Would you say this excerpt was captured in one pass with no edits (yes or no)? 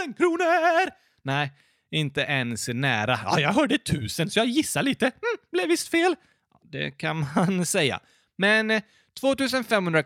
yes